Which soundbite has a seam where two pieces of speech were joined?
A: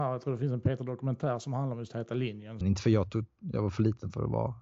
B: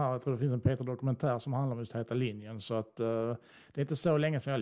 A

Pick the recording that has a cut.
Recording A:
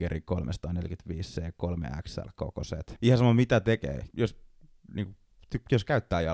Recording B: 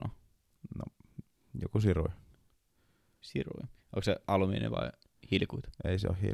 A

